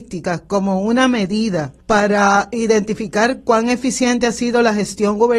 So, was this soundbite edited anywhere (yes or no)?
yes